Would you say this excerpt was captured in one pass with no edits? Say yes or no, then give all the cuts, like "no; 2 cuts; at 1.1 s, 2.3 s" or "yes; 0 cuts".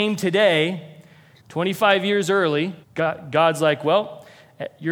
no; 2 cuts; at 1.4 s, 2.8 s